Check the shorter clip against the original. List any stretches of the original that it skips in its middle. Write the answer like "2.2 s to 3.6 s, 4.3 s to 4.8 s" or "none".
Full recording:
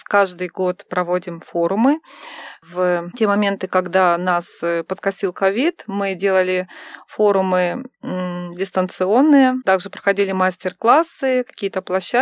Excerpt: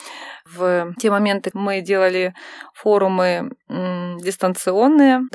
3.7 s to 5.8 s